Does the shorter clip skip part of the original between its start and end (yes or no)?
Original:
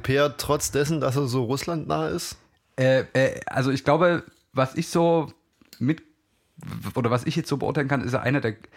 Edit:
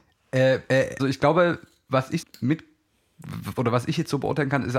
yes